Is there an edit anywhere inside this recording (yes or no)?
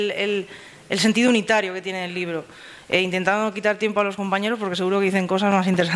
no